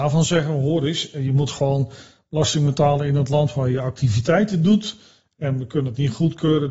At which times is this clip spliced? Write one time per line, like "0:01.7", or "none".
none